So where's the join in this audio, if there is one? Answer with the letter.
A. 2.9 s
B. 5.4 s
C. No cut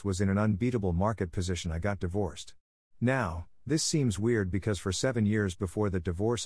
A